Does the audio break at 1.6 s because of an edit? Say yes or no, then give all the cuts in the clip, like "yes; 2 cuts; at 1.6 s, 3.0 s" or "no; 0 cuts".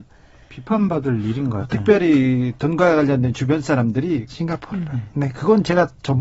yes; 2 cuts; at 1.6 s, 4.3 s